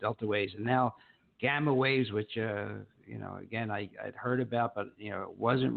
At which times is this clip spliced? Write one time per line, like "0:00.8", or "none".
none